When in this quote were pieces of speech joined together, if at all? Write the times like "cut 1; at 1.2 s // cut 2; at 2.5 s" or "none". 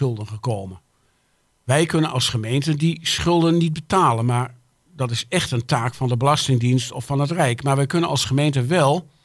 none